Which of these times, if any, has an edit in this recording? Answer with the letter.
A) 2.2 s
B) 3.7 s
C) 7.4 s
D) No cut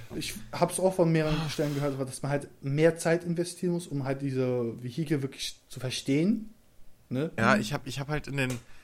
C